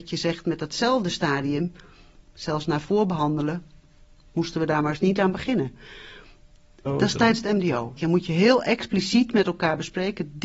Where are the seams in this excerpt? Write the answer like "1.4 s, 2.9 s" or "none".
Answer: 6.9 s, 8.0 s